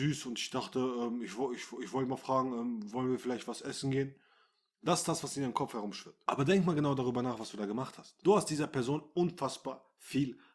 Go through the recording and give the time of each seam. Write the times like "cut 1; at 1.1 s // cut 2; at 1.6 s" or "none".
none